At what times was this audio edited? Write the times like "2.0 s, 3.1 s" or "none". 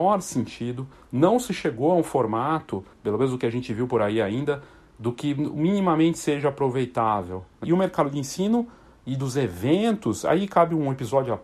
2.9 s, 7.6 s